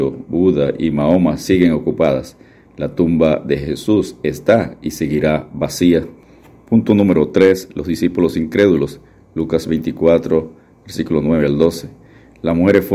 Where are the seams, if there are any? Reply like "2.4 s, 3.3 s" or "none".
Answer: none